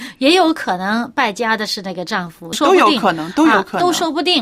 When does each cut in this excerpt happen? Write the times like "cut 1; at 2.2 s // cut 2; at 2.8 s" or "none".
cut 1; at 2.5 s

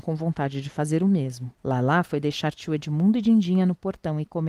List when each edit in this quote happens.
cut 1; at 1.6 s

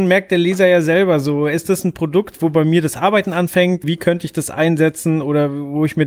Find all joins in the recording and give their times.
cut 1; at 3.8 s

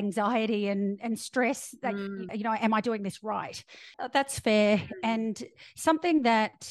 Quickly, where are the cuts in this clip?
cut 1; at 2.3 s // cut 2; at 3.9 s

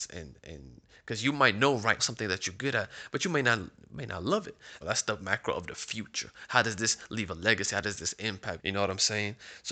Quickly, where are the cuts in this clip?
cut 1; at 2.0 s // cut 2; at 4.8 s // cut 3; at 8.6 s

